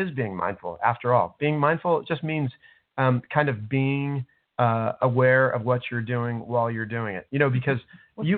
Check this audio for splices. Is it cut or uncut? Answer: uncut